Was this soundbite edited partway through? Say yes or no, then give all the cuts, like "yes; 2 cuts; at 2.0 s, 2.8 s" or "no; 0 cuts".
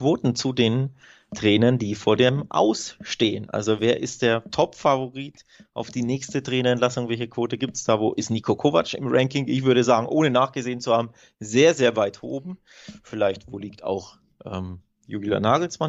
no; 0 cuts